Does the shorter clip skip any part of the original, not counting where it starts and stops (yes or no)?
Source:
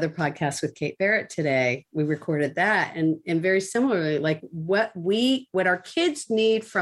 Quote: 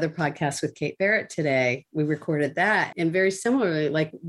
yes